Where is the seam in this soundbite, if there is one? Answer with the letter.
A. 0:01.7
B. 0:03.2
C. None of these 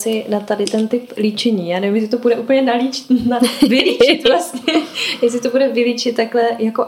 C